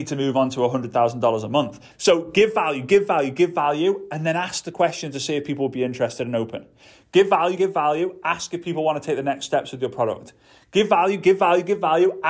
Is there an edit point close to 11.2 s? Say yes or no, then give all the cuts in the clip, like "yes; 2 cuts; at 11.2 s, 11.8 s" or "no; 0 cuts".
no; 2 cuts; at 1.9 s, 7.6 s